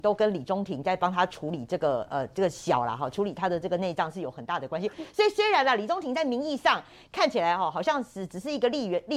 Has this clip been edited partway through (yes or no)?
no